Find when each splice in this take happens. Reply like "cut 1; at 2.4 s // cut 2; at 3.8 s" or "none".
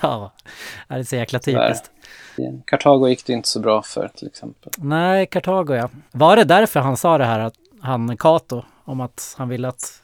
cut 1; at 6.1 s

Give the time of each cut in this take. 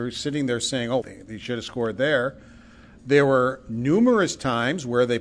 cut 1; at 1.0 s

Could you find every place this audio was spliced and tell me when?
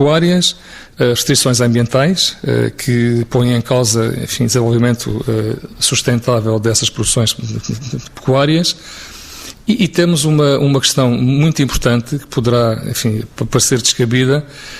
none

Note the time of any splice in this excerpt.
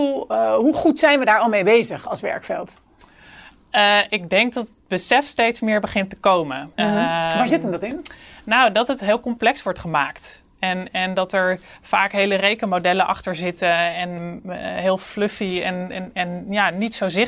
cut 1; at 6.7 s // cut 2; at 14.2 s

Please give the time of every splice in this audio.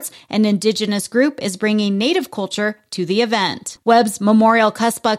cut 1; at 3.8 s

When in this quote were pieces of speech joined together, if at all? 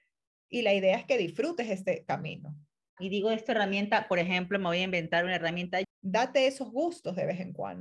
cut 1; at 3.0 s // cut 2; at 5.8 s

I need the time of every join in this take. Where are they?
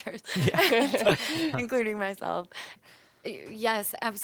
cut 1; at 1.5 s // cut 2; at 2.8 s

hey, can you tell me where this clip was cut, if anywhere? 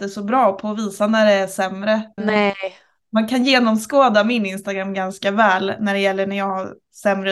cut 1; at 2.2 s

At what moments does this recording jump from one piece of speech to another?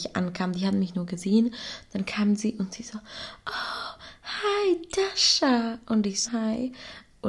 cut 1; at 6.2 s

